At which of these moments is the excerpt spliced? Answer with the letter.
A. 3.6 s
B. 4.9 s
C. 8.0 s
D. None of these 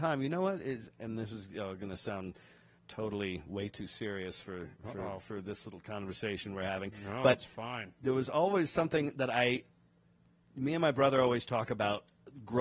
D